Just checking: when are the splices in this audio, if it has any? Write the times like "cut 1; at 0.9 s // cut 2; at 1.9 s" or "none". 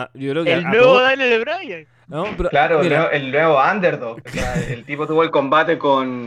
none